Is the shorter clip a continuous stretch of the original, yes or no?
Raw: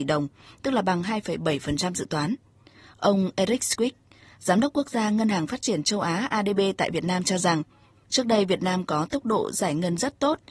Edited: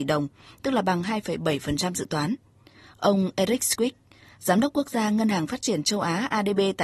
yes